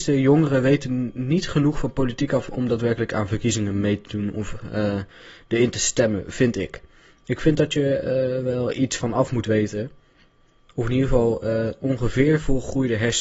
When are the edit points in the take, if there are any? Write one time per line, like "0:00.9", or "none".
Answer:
none